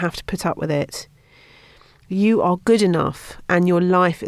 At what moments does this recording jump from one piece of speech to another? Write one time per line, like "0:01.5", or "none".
none